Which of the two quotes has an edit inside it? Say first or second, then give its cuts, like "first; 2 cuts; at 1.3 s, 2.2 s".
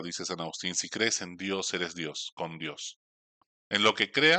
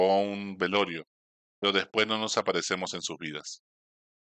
first; 1 cut; at 3.5 s